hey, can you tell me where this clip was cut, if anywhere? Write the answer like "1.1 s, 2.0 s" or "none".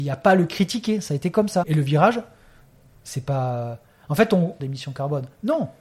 1.6 s, 4.6 s